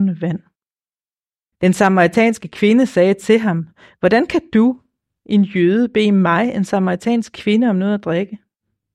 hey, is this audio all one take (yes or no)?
no